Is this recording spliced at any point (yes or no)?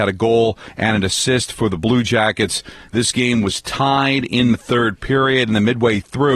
yes